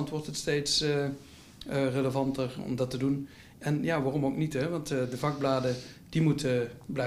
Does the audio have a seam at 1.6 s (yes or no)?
no